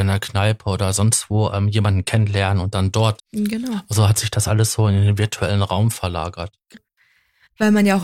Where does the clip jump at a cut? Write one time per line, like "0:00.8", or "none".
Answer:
0:03.2
0:06.7